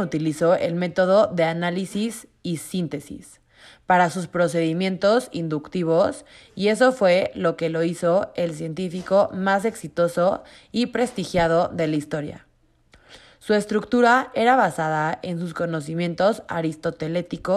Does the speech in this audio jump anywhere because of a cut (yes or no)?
no